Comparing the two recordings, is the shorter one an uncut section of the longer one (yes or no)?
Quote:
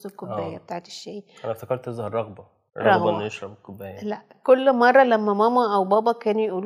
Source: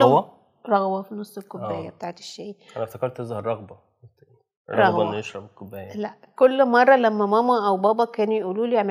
no